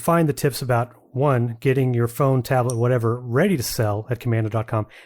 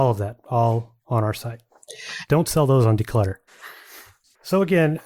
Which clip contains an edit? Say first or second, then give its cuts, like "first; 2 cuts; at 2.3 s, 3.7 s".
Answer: second; 2 cuts; at 2.3 s, 3.5 s